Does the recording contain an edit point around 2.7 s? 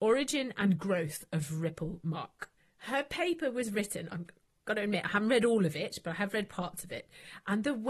no; 1 cut; at 4.1 s

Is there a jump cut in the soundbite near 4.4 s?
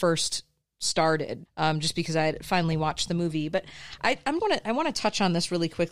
yes; 2 cuts; at 1.5 s, 4.4 s

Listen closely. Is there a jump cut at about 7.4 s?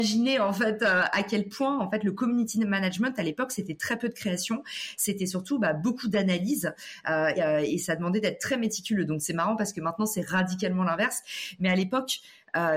yes; 1 cut; at 7.4 s

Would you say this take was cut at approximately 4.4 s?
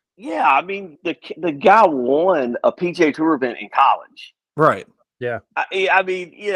no; 1 cut; at 1.0 s

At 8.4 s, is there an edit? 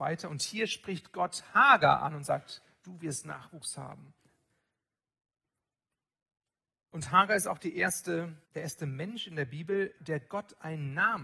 yes; 2 cuts; at 8.4 s, 10.0 s

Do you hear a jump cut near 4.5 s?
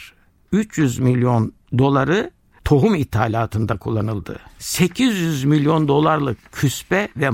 yes; 1 cut; at 4.5 s

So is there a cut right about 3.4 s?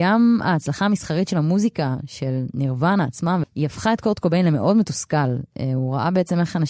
yes; 1 cut; at 3.4 s

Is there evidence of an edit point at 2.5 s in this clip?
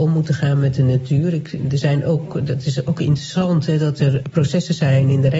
no; 0 cuts

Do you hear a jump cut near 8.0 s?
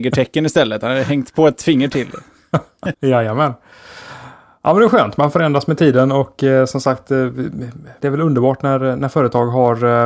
yes; 2 cuts; at 2.9 s, 8.0 s

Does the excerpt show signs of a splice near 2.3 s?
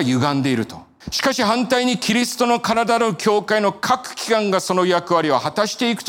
no; 1 cut; at 1.0 s

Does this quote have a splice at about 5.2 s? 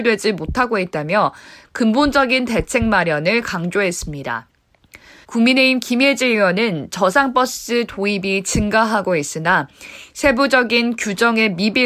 yes; 1 cut; at 5.2 s

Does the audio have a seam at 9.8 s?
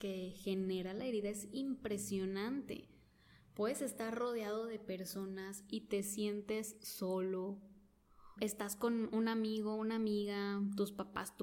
no; 1 cut; at 8.4 s

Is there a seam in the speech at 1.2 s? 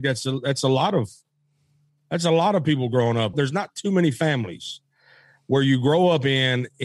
no; 1 cut; at 3.3 s

